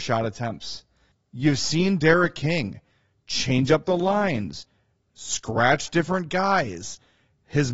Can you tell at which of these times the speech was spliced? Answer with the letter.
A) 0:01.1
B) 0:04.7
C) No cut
A